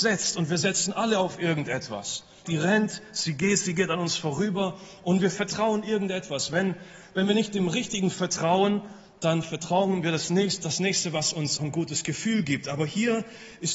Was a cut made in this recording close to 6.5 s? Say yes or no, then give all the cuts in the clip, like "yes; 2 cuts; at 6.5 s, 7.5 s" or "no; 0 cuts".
no; 2 cuts; at 2.4 s, 11.6 s